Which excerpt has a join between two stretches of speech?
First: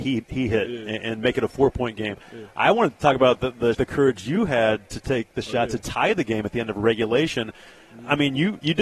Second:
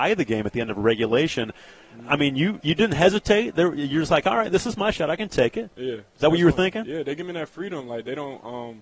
first; 1 cut; at 3.7 s

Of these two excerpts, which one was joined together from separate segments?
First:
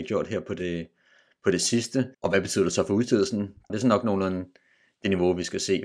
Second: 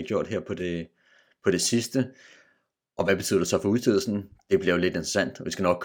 first; 2 cuts; at 2.1 s, 3.7 s

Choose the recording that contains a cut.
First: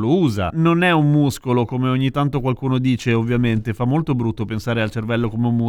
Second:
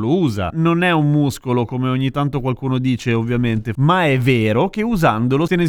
second; 1 cut; at 3.7 s

